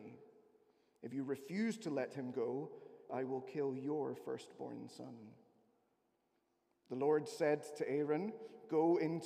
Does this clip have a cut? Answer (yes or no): yes